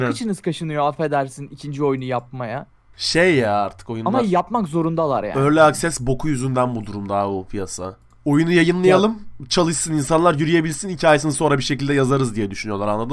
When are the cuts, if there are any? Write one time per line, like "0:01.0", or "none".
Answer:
0:02.9